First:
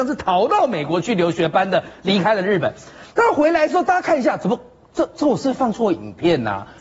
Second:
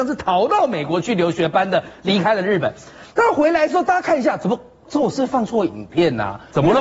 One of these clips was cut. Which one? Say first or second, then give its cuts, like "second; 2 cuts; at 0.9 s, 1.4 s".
second; 1 cut; at 4.8 s